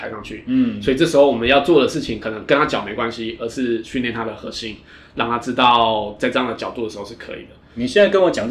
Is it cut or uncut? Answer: uncut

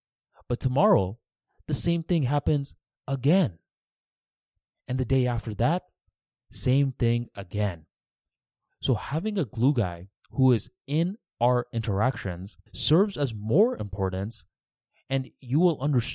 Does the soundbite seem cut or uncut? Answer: cut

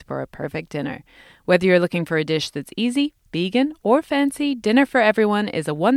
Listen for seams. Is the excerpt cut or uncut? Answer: uncut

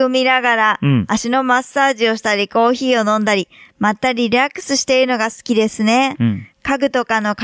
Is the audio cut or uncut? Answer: uncut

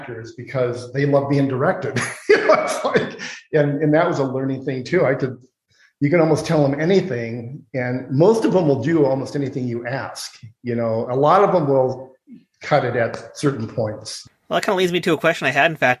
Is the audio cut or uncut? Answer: uncut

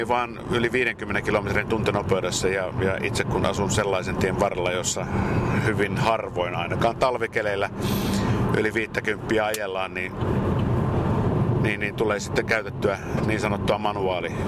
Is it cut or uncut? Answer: uncut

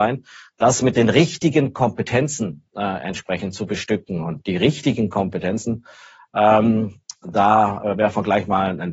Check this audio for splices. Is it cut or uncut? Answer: uncut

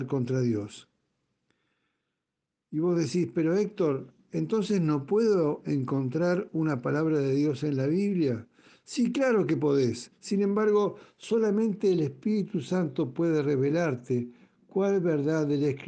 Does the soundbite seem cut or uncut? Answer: uncut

